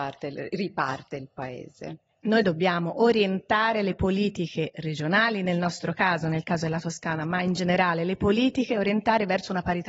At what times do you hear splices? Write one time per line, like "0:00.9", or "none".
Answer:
none